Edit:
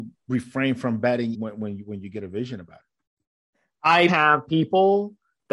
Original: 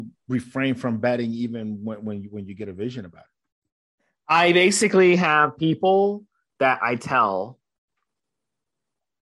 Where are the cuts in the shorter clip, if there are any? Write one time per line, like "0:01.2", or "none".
0:01.3
0:04.1